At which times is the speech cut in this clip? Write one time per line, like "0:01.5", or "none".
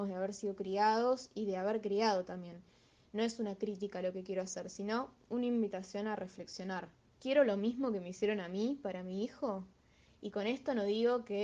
0:07.1